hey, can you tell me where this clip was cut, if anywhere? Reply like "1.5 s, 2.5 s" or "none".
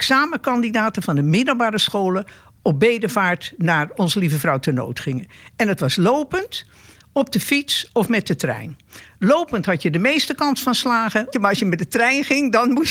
11.3 s